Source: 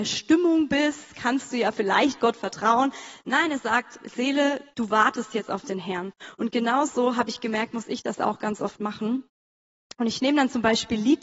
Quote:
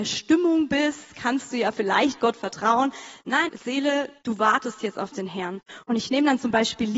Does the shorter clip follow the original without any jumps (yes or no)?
no